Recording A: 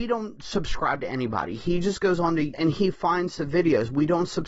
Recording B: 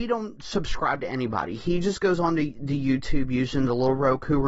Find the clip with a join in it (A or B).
A